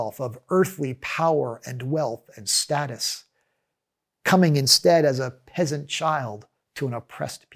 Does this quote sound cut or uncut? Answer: uncut